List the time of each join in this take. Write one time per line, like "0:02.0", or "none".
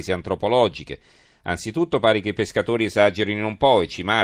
none